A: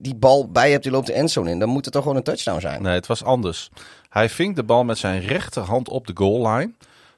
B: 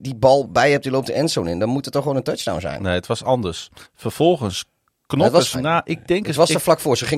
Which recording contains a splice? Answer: B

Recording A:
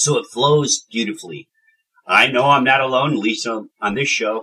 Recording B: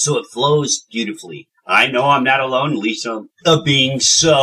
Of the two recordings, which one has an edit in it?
B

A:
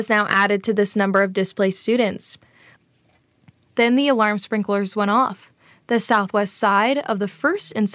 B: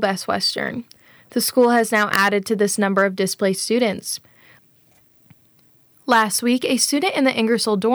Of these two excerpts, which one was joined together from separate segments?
A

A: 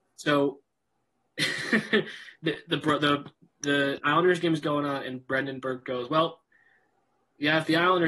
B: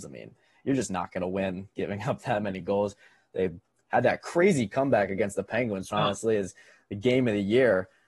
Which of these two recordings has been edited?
B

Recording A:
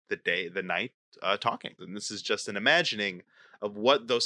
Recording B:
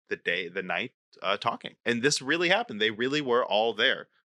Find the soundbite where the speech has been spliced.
A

